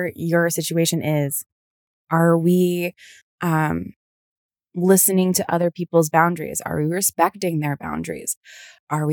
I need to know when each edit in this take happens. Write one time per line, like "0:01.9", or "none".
0:02.0